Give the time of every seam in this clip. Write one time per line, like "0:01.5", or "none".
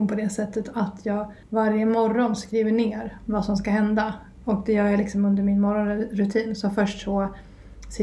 0:01.4